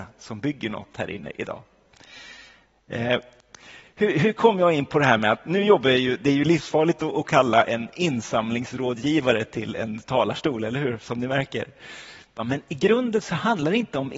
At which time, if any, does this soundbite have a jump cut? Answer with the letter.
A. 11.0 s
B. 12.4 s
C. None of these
B